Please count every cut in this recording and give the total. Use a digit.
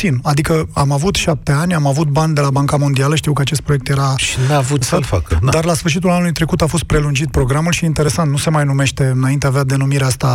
1